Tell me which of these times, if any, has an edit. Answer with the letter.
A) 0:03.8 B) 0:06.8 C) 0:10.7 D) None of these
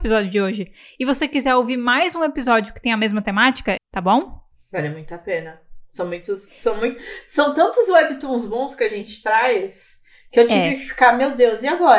A